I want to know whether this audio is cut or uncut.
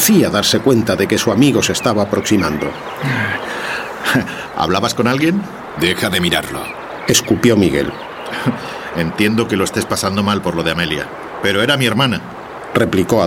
cut